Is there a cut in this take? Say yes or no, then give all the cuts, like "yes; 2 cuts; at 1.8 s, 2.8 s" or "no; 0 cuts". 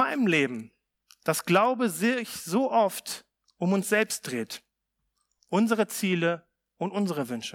no; 0 cuts